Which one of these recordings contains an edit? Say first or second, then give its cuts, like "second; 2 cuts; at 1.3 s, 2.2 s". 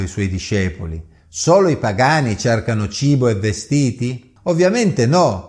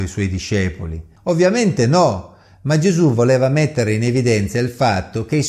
second; 1 cut; at 1.2 s